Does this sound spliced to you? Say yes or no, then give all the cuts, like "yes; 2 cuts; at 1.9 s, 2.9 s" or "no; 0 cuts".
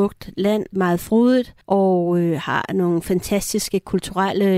yes; 1 cut; at 1.6 s